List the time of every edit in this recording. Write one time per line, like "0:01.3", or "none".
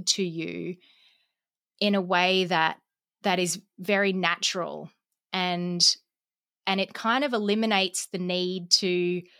none